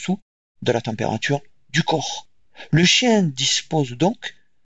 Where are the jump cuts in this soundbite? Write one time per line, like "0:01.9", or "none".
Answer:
none